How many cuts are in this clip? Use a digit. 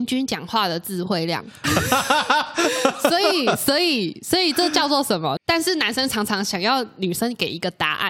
2